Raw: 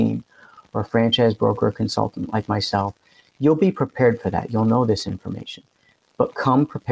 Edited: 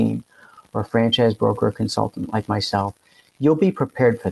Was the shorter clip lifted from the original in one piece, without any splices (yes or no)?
yes